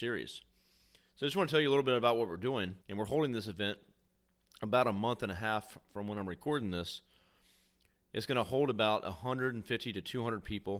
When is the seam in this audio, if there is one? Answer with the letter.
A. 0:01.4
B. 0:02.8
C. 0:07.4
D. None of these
B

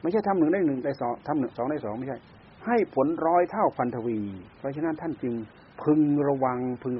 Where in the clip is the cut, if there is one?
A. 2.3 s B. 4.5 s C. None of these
B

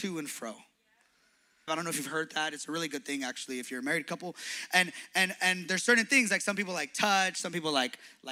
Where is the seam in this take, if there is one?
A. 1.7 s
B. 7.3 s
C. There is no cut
A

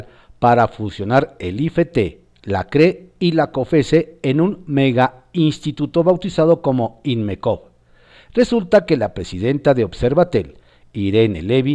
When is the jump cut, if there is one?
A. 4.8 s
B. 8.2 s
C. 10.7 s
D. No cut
D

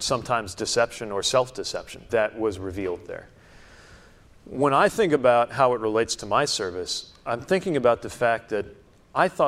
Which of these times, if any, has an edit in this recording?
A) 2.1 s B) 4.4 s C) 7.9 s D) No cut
A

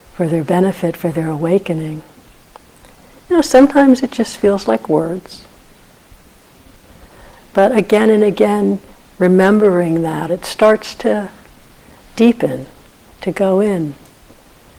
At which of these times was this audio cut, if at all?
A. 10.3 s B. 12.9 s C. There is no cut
A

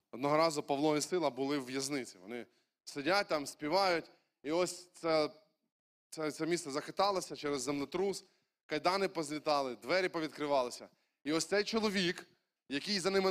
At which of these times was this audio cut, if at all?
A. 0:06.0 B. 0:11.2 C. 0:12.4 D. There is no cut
D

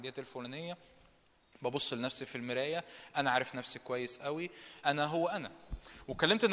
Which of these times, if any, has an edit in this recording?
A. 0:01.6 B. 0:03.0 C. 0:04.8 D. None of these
C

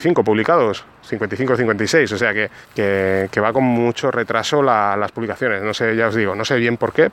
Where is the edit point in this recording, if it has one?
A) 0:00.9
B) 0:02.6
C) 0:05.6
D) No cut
B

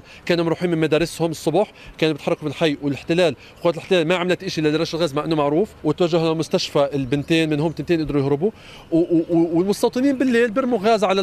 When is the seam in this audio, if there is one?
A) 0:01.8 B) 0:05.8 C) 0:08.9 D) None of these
B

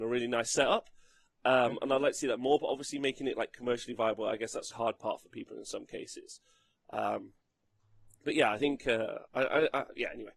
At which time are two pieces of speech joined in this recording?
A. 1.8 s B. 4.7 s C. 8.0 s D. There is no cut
B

